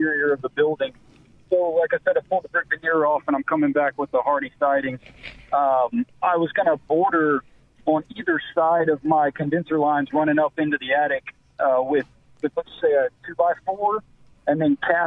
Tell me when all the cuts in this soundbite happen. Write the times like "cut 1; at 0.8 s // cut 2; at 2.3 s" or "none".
none